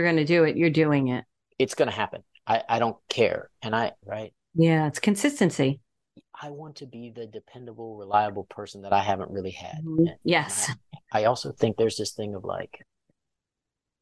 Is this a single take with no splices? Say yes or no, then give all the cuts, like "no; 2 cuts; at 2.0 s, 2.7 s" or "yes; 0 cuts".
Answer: no; 2 cuts; at 4.0 s, 11.0 s